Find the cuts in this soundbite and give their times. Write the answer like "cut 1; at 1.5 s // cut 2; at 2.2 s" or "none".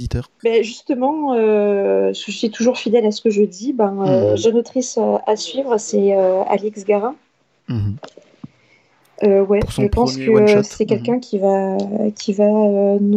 none